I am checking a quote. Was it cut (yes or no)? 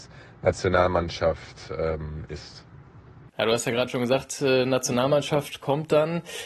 no